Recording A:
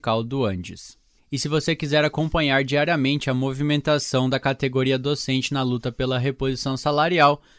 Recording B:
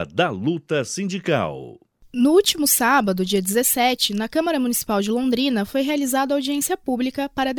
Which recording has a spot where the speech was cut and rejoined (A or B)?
A